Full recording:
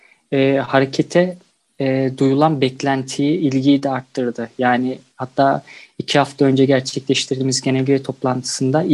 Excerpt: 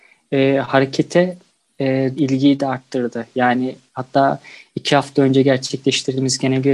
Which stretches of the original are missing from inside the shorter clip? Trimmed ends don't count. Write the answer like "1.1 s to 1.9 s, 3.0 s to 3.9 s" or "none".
2.2 s to 3.4 s